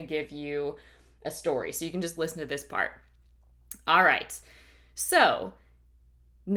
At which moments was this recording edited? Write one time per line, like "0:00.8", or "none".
none